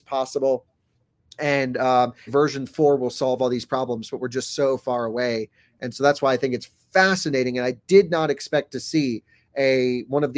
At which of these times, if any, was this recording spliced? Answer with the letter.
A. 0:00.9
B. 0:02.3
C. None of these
B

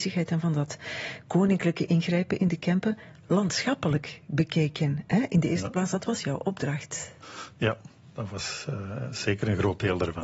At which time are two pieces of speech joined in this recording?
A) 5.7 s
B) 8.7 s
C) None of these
C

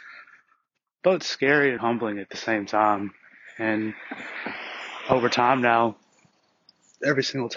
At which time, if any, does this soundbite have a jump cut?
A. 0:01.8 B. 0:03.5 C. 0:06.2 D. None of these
A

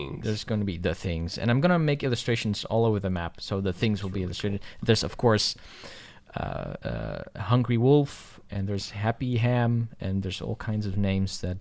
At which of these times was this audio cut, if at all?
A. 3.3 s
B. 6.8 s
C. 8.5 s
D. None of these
D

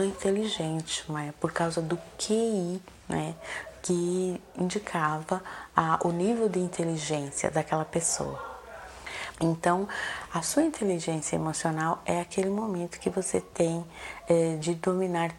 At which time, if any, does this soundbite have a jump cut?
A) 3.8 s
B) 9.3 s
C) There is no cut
B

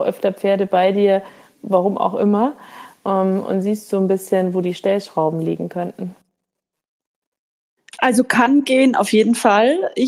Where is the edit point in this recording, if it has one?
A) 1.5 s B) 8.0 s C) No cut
A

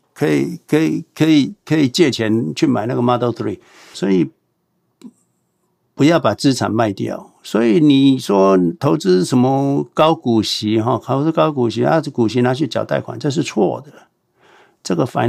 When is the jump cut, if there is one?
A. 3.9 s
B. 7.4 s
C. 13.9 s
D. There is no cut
A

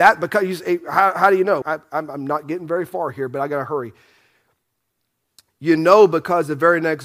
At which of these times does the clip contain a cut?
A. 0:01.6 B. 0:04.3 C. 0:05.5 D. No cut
A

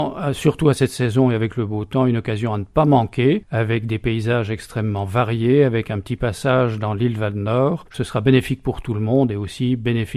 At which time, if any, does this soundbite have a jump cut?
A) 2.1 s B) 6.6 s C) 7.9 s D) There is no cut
D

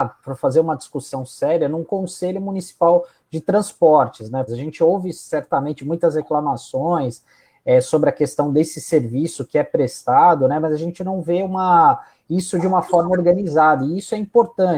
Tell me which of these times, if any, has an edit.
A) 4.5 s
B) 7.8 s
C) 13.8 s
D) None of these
A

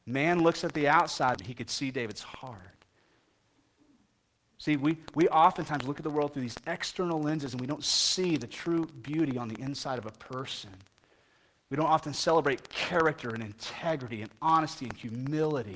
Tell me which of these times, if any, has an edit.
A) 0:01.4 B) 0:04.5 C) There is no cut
A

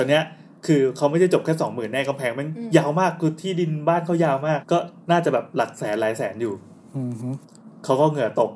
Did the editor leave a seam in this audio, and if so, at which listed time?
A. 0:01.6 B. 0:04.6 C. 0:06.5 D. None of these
B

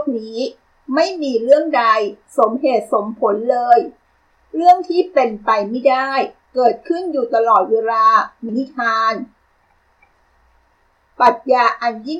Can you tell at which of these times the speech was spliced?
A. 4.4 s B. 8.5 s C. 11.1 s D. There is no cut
B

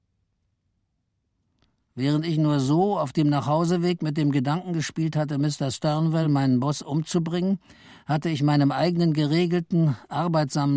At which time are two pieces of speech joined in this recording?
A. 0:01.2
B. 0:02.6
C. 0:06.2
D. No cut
D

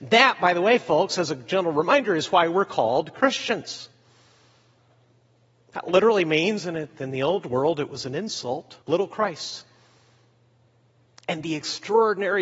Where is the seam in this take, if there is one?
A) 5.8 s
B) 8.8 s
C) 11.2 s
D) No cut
B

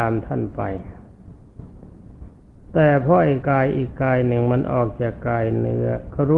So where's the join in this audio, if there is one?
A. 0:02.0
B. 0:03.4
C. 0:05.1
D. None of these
B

